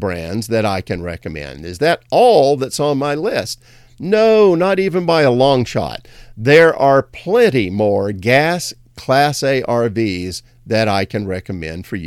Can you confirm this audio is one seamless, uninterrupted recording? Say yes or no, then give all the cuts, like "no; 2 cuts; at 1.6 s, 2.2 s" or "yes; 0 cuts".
yes; 0 cuts